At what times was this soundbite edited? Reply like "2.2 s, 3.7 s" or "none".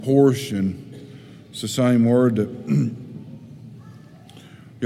none